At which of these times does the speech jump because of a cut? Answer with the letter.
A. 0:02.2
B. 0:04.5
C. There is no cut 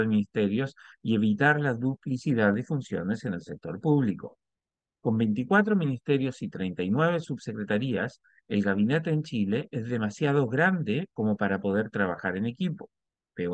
C